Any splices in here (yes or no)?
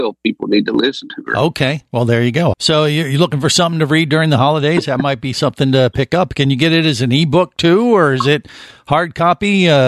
yes